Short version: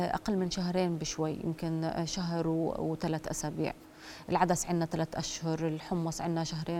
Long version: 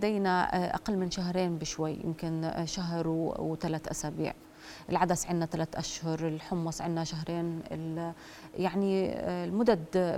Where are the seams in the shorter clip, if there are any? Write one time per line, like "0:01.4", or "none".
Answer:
none